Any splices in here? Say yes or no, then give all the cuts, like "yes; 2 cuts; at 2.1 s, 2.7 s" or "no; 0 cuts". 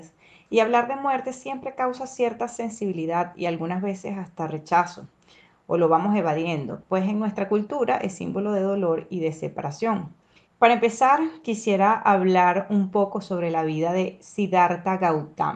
yes; 1 cut; at 10.5 s